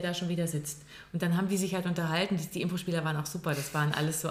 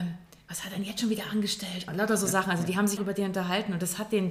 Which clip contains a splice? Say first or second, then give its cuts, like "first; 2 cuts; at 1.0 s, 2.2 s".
second; 2 cuts; at 1.9 s, 3.0 s